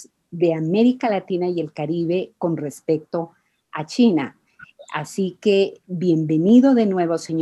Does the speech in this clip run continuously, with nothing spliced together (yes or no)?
yes